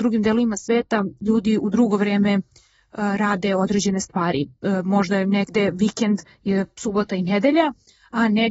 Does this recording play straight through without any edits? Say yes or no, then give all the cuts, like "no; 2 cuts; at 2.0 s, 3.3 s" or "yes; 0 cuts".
yes; 0 cuts